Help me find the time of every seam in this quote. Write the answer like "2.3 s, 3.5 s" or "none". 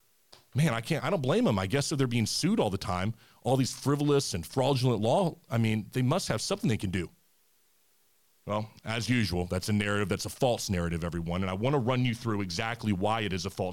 1.0 s